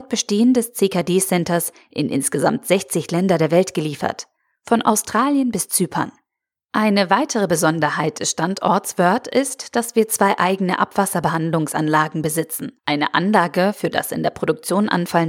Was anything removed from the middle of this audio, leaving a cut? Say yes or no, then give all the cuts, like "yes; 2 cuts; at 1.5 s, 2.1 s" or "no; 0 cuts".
yes; 1 cut; at 12.8 s